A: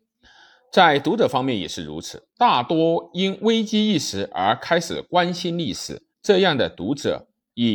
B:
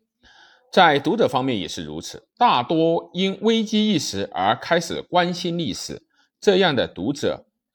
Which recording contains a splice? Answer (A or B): A